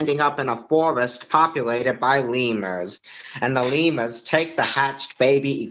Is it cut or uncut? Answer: uncut